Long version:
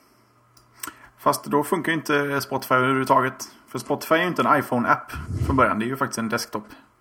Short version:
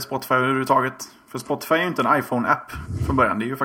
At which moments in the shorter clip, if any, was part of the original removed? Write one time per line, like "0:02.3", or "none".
none